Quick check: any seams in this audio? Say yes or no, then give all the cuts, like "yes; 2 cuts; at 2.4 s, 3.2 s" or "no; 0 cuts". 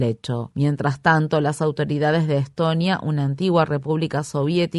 no; 0 cuts